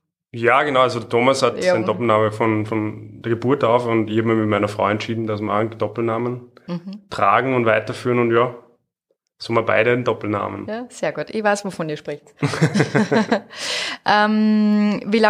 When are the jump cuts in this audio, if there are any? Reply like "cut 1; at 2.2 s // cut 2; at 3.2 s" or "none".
none

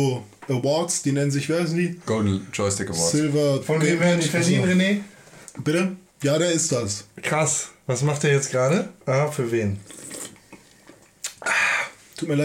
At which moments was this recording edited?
cut 1; at 6.1 s // cut 2; at 9.0 s

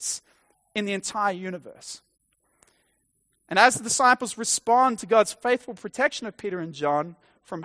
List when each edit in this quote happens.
none

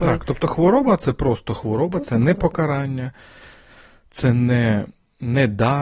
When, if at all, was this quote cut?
none

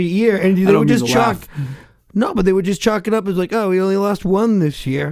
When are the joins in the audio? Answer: none

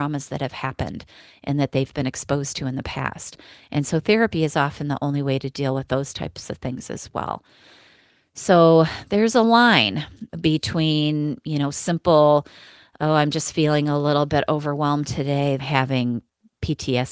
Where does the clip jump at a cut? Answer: cut 1; at 15.6 s

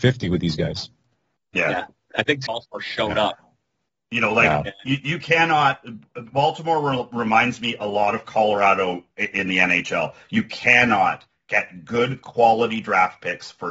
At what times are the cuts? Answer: cut 1; at 2.5 s

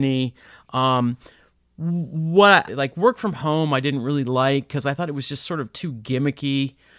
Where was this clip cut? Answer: cut 1; at 2.7 s

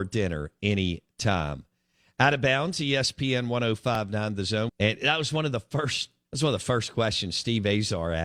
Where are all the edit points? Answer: cut 1; at 4.7 s // cut 2; at 6.2 s

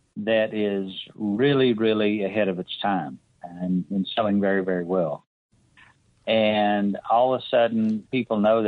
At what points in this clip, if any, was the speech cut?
none

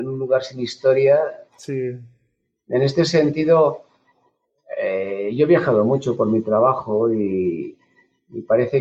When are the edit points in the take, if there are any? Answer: cut 1; at 1.5 s

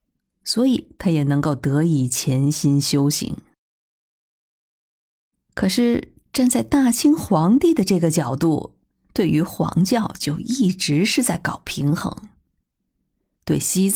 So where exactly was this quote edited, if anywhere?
none

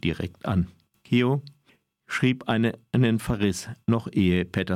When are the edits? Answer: none

